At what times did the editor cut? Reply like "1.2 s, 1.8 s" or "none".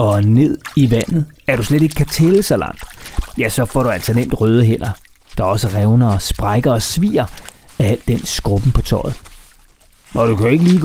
1.3 s